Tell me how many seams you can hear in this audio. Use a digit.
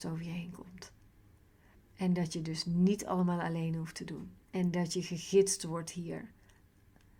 2